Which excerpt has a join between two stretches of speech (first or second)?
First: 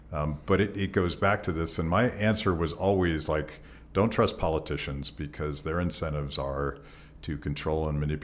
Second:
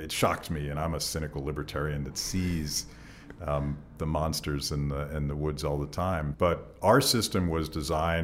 second